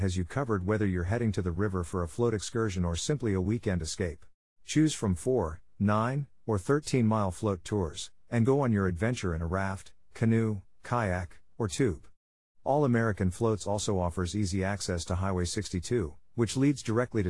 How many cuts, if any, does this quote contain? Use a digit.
1